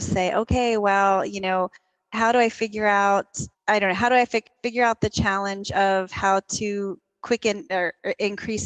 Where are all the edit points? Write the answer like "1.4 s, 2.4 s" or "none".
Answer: 3.5 s